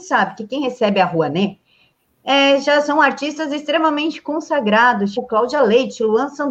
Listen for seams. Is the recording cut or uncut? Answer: cut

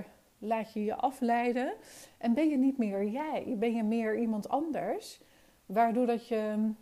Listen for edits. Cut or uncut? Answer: uncut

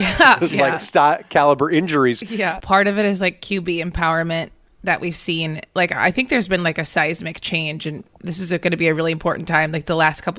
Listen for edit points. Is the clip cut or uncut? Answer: cut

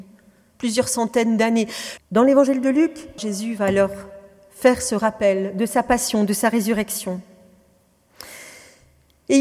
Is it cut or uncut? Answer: cut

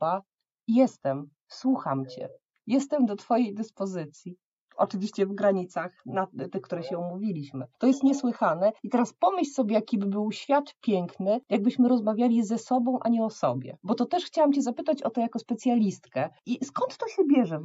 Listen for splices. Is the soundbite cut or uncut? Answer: uncut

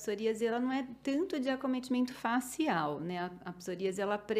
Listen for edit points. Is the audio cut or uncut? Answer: uncut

